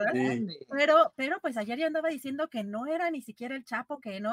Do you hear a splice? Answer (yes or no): no